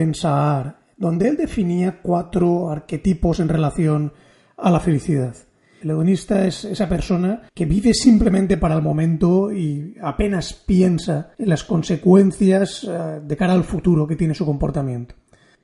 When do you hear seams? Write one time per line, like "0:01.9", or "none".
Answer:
0:05.8
0:07.5
0:11.3

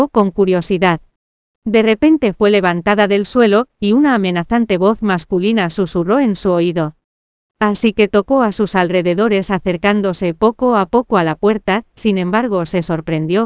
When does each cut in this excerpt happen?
0:03.7
0:07.4

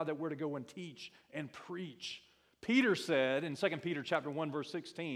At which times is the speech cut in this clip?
none

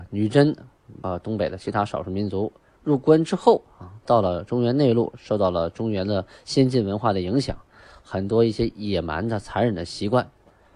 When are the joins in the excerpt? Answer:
0:01.0

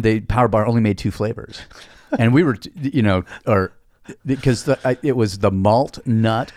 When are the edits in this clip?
none

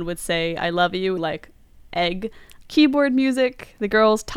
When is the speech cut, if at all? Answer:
0:01.2
0:02.6

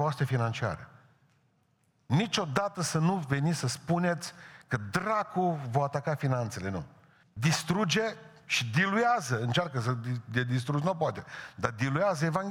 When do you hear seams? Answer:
0:07.2

